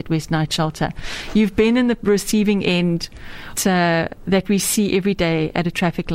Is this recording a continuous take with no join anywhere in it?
no; 1 cut; at 3.6 s

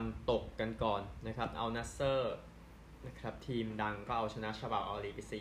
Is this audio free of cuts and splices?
yes; 0 cuts

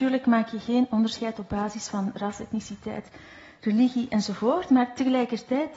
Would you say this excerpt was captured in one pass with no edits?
yes; 0 cuts

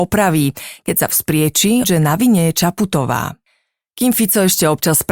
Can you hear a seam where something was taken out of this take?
yes; 1 cut; at 1.8 s

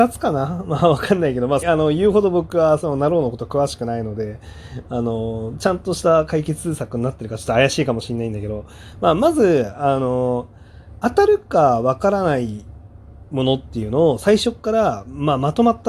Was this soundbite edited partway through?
yes; 2 cuts; at 1.6 s, 11.0 s

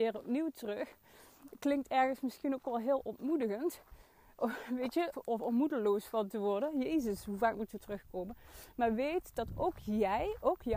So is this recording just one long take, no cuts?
no; 1 cut; at 5.1 s

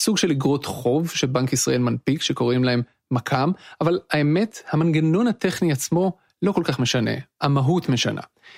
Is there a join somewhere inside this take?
yes; 1 cut; at 7.4 s

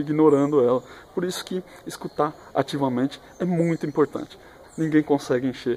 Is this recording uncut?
no; 1 cut; at 4.6 s

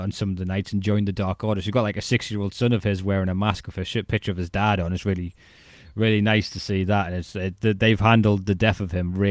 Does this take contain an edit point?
no; 0 cuts

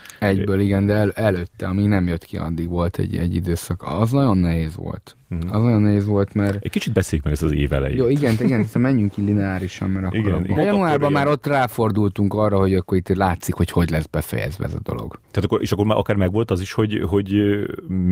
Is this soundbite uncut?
no; 1 cut; at 10.6 s

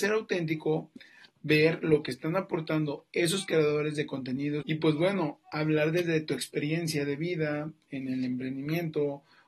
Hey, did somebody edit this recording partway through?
yes; 1 cut; at 4.6 s

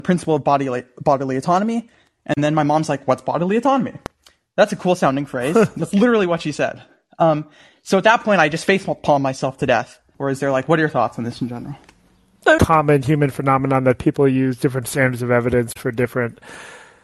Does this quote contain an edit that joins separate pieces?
yes; 2 cuts; at 10.1 s, 12.6 s

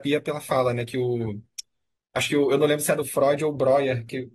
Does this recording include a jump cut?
no; 0 cuts

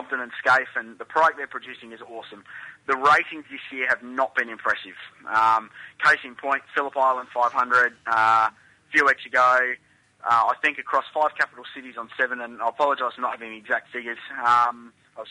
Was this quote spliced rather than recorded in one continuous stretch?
no; 0 cuts

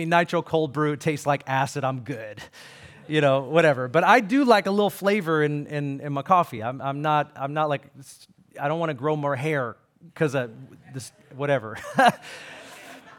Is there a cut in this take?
no; 0 cuts

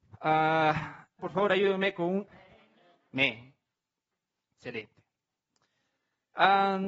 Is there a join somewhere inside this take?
yes; 2 cuts; at 1.2 s, 2.3 s

